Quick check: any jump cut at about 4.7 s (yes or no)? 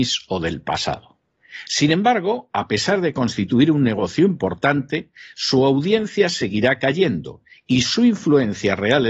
no